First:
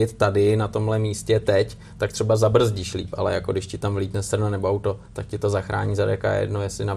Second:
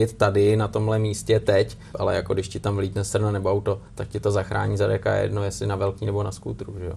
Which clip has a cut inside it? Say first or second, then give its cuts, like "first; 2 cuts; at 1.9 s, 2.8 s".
second; 1 cut; at 1.9 s